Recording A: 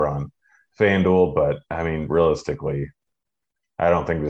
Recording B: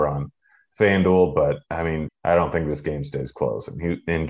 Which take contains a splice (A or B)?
B